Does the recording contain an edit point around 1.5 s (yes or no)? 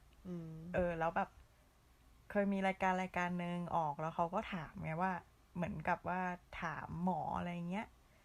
no